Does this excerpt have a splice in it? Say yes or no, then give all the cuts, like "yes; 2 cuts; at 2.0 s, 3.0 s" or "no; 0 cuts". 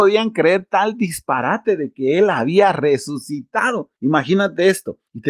no; 0 cuts